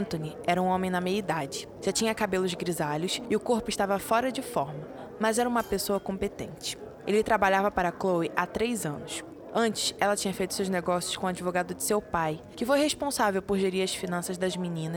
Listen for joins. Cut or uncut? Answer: uncut